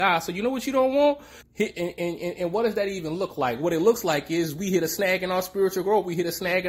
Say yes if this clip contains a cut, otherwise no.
yes